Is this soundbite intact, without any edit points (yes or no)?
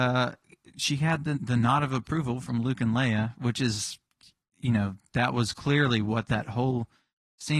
no